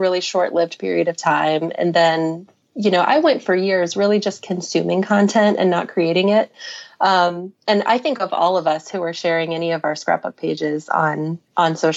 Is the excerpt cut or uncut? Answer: uncut